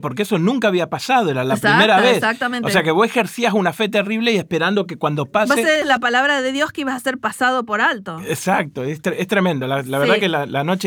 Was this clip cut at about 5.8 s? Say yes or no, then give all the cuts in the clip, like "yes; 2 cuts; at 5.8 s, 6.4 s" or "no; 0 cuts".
yes; 1 cut; at 5.8 s